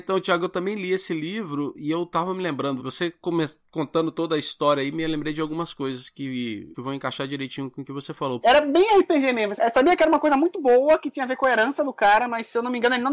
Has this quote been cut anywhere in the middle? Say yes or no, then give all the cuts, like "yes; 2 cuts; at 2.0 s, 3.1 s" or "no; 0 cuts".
yes; 3 cuts; at 2.8 s, 8.4 s, 9.6 s